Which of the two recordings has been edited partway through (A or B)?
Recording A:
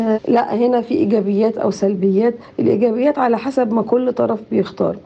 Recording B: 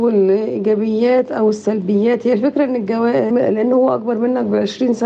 B